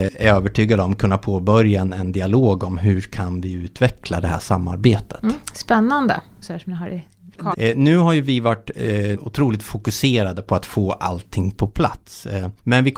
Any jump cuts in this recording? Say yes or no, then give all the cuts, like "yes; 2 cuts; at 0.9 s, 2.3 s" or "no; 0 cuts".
yes; 3 cuts; at 6.4 s, 7.5 s, 9.1 s